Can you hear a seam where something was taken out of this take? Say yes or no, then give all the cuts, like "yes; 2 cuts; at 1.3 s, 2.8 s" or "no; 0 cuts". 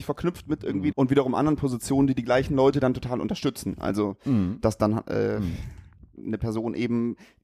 yes; 1 cut; at 0.9 s